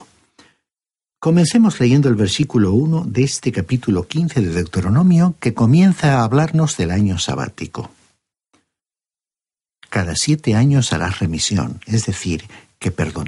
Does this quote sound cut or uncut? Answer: uncut